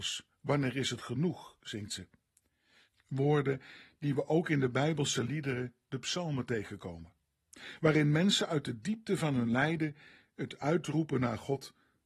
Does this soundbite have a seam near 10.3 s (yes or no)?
no